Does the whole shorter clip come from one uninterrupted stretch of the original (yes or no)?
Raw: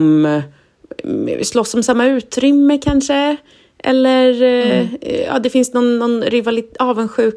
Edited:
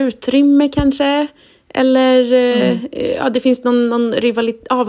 yes